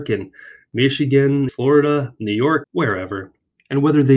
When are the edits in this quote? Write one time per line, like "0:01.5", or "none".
0:01.5
0:02.6